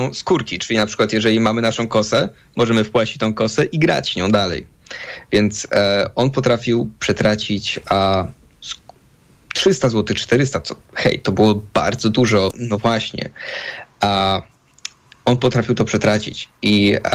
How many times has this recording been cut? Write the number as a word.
one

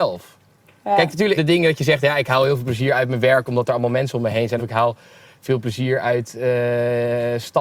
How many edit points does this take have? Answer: two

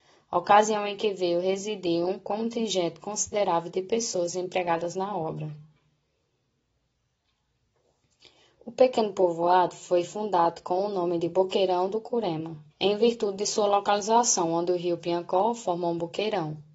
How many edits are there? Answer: one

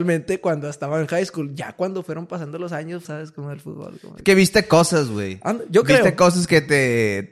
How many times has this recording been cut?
one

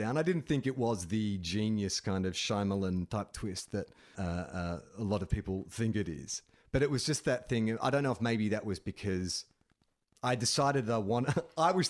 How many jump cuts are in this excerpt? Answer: one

